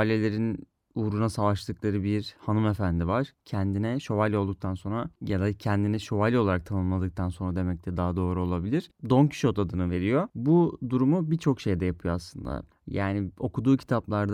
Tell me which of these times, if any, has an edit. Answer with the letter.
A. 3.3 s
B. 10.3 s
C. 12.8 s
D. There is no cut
A